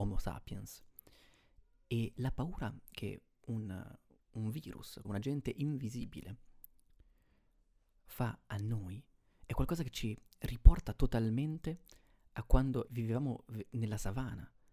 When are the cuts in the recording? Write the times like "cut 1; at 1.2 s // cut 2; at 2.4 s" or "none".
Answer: cut 1; at 5.0 s // cut 2; at 12.9 s